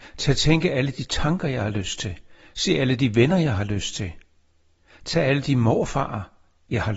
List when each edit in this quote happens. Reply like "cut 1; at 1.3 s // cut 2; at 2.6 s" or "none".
none